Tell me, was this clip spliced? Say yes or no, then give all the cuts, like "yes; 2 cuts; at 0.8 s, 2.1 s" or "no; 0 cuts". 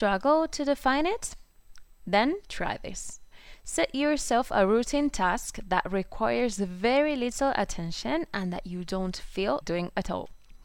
yes; 1 cut; at 9.6 s